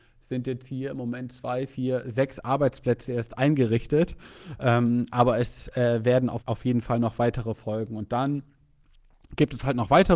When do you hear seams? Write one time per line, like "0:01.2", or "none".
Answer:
0:06.4

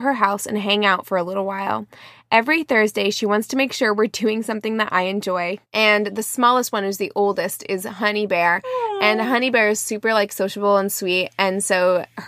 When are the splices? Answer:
0:05.6

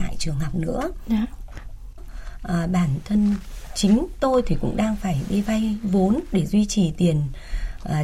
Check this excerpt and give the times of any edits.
0:02.0

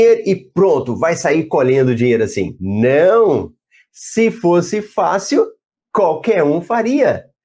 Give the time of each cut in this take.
none

